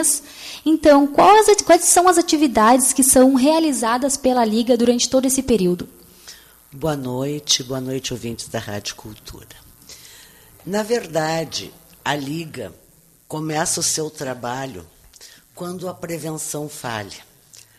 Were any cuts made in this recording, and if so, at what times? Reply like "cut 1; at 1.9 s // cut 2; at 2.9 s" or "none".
none